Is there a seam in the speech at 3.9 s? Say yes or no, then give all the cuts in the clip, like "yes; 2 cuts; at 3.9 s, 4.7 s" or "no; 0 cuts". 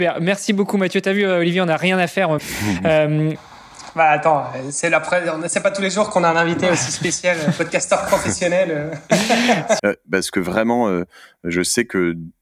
no; 2 cuts; at 2.4 s, 9.8 s